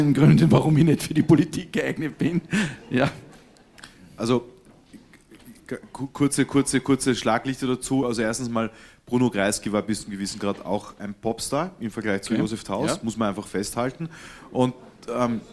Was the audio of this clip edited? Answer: no; 0 cuts

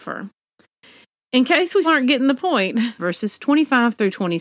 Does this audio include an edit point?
yes; 2 cuts; at 1.8 s, 3.0 s

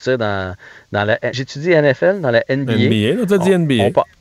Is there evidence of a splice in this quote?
no; 0 cuts

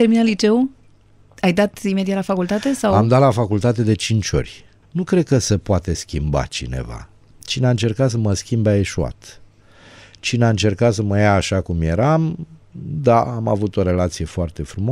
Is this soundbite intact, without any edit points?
no; 1 cut; at 4.8 s

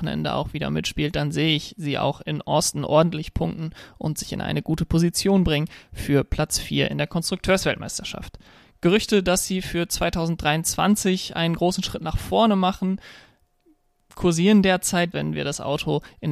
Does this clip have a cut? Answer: yes; 1 cut; at 15.1 s

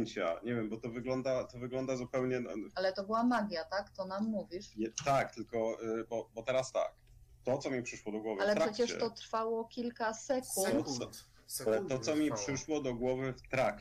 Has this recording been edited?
no; 0 cuts

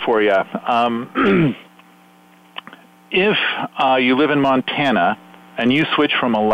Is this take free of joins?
yes; 0 cuts

